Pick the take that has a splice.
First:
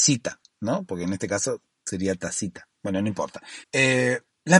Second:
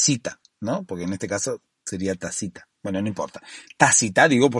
first; 1 cut; at 3.6 s

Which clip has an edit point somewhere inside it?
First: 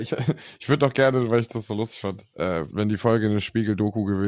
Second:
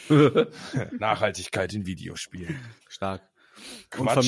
first; 1 cut; at 2.7 s

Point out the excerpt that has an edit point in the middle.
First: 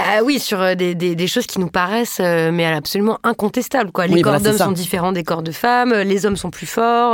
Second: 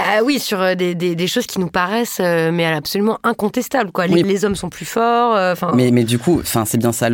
second; 1 cut; at 4.2 s

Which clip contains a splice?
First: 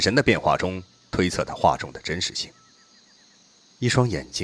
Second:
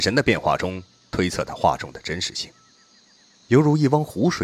second; 1 cut; at 3.4 s

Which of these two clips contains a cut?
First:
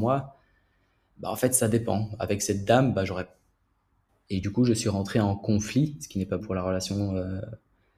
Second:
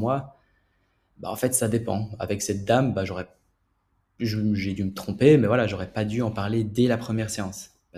first; 2 cuts; at 4.1 s, 6.4 s

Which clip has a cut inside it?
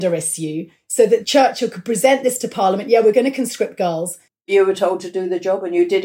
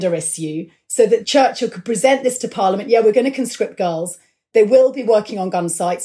first; 1 cut; at 4.3 s

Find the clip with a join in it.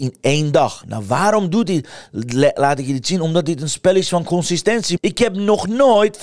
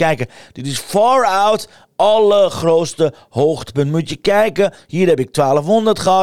first; 1 cut; at 5.0 s

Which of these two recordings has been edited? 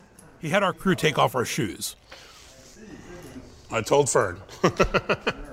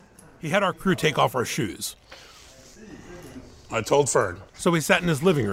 second; 1 cut; at 4.5 s

